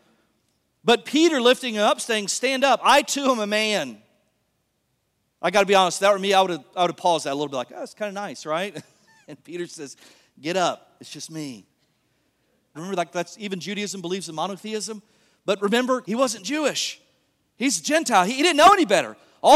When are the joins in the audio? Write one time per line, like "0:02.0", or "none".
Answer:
0:12.7
0:16.0